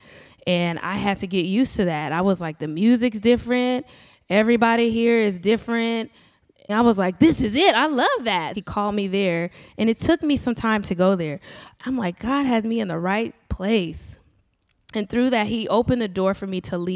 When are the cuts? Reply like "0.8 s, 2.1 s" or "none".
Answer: 6.7 s, 8.5 s, 11.8 s